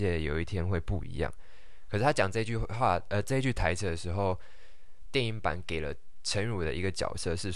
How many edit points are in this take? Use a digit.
0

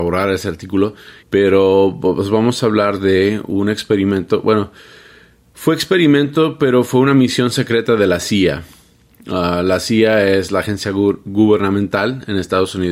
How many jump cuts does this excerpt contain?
1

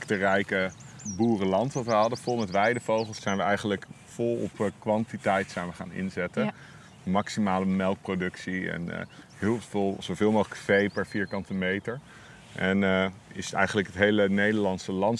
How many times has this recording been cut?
0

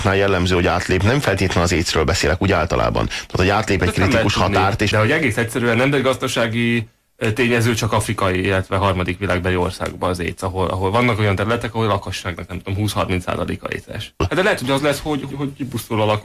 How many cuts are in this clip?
3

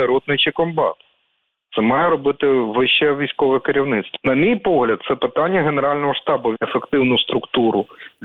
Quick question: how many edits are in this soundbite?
2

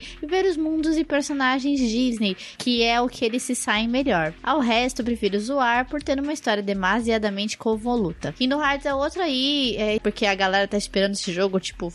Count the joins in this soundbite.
2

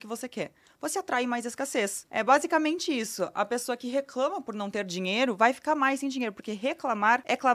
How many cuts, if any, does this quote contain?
1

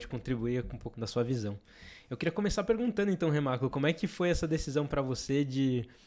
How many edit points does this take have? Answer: 1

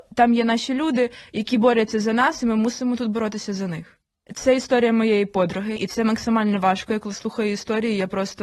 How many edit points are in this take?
2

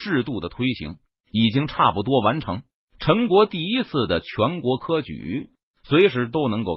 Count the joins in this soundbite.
0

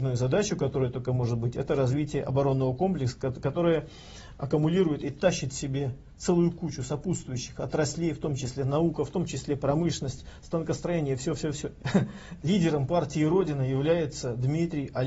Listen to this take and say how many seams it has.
1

